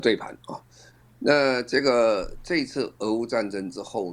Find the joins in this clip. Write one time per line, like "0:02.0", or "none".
none